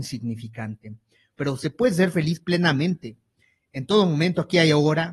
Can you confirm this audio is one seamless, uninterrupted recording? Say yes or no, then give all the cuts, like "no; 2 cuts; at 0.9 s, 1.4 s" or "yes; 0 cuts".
no; 1 cut; at 1.3 s